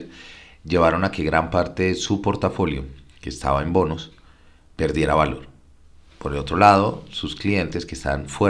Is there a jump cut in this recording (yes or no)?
no